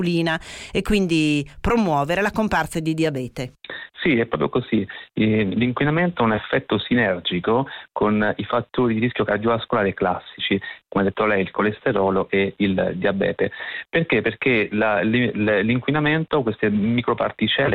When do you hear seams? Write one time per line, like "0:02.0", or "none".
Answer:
none